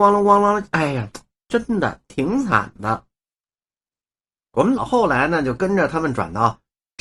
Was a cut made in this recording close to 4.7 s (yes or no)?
yes